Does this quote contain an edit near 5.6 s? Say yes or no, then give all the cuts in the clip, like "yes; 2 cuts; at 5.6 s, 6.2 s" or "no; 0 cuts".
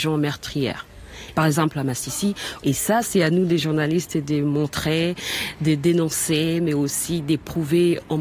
no; 2 cuts; at 1.3 s, 2.6 s